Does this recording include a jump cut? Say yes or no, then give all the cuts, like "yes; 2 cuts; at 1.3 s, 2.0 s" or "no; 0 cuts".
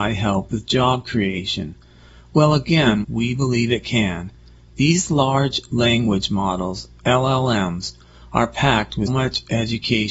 yes; 2 cuts; at 3.0 s, 9.1 s